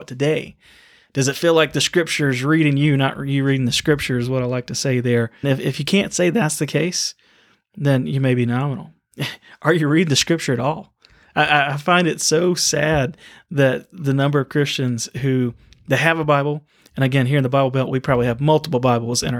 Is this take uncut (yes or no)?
no